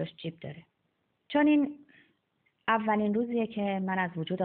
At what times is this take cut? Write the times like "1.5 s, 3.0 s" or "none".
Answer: 1.1 s